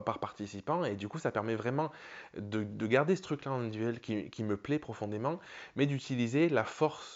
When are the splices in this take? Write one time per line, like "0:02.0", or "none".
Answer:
none